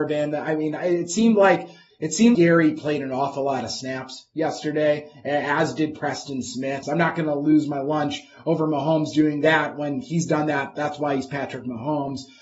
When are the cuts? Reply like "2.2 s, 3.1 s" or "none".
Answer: 2.3 s, 6.8 s, 10.8 s